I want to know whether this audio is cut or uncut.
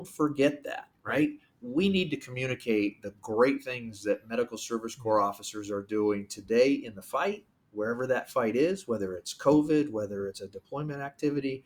cut